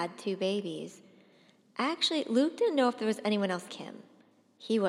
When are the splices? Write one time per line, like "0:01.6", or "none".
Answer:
0:03.7